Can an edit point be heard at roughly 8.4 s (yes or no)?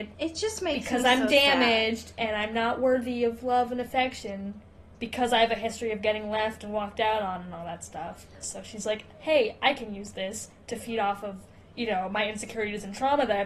yes